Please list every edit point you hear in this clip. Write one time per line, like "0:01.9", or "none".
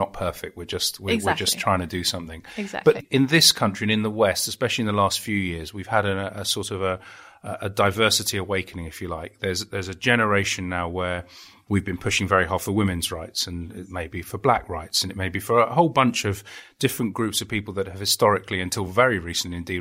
none